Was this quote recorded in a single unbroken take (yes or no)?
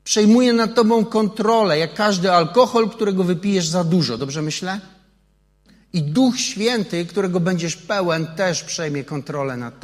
yes